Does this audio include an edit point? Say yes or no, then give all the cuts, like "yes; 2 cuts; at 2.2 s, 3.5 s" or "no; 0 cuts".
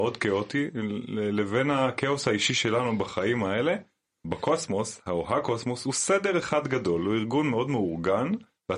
yes; 1 cut; at 4.2 s